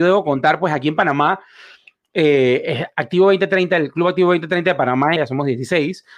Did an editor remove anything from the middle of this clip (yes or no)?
yes